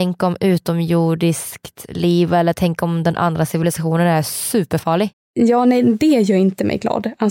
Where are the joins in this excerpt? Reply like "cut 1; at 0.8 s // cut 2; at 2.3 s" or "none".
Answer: cut 1; at 5.1 s